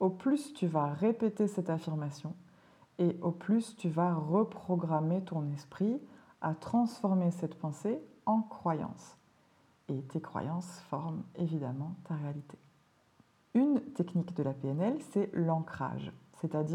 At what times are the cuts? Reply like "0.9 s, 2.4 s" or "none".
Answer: 13.4 s